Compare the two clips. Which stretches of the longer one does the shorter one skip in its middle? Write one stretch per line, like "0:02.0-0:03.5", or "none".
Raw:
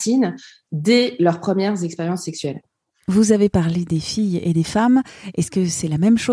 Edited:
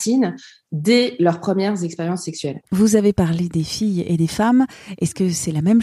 0:02.7-0:03.0